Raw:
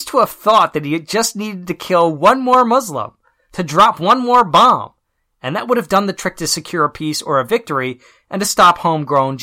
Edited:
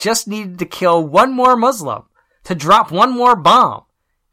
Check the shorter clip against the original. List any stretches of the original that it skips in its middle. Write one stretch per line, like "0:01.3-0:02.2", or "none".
none